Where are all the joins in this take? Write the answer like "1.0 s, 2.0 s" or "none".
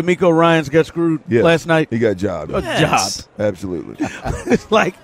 2.5 s, 3.9 s